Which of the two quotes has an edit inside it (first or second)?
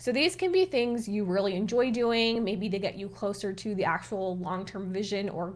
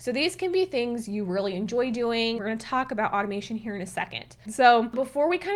second